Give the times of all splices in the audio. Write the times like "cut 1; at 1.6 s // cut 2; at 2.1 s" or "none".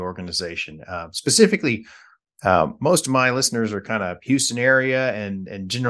none